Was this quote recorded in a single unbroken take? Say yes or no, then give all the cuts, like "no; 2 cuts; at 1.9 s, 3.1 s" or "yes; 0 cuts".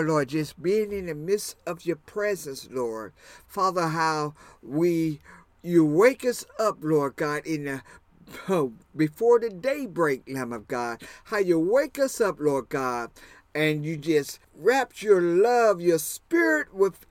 yes; 0 cuts